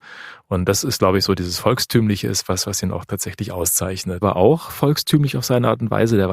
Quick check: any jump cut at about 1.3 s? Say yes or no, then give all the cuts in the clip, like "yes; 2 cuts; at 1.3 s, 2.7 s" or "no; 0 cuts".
no; 1 cut; at 4.2 s